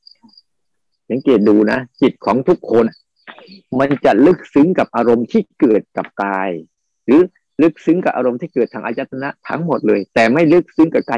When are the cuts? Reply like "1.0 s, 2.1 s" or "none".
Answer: 2.9 s